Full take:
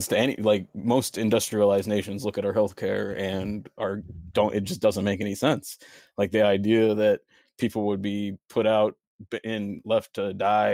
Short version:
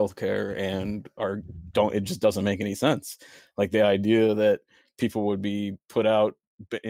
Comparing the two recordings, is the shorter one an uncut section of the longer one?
yes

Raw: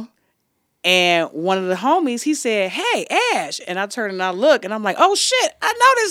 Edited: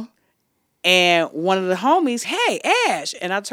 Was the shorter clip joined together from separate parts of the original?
yes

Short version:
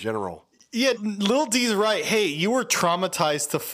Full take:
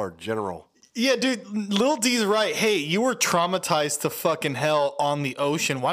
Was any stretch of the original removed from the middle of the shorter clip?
yes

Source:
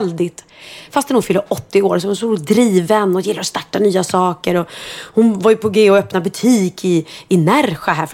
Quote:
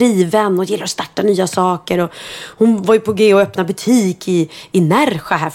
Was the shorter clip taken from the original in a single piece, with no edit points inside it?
yes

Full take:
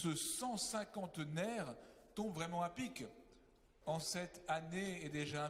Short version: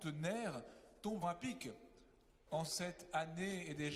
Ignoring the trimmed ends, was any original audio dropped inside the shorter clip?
yes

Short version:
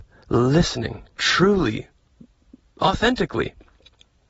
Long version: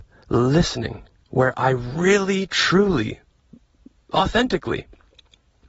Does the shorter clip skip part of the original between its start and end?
yes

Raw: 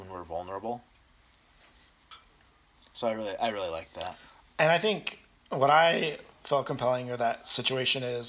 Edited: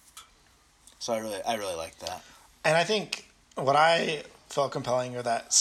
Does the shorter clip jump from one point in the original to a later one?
no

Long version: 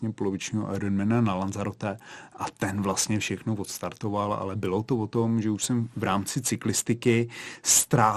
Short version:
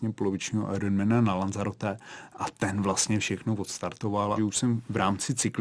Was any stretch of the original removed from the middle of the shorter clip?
yes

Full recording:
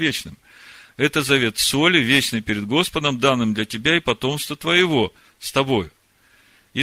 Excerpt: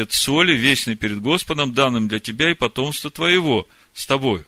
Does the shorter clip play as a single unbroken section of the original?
yes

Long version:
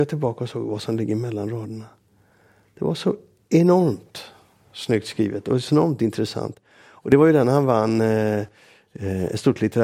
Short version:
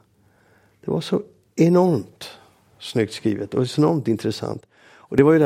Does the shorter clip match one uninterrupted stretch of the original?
yes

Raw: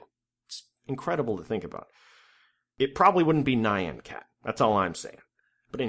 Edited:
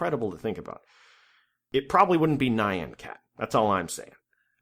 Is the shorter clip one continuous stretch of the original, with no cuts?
yes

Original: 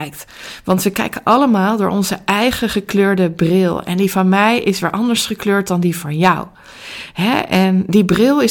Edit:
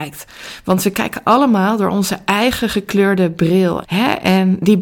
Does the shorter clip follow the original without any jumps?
no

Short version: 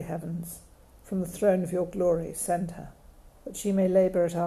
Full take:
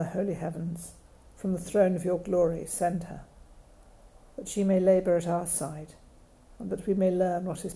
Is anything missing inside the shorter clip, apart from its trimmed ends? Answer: yes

